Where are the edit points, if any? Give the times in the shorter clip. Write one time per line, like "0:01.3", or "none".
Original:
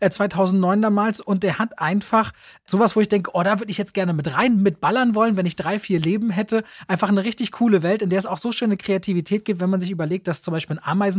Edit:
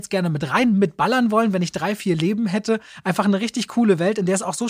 none